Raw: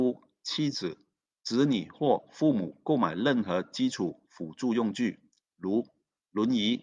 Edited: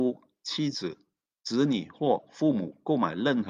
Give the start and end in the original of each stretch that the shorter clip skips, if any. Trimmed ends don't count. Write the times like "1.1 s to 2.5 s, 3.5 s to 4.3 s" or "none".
none